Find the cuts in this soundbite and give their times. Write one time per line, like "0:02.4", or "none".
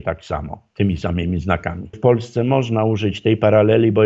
0:01.9